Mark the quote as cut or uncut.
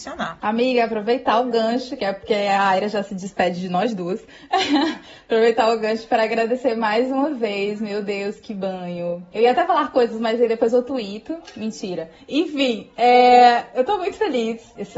uncut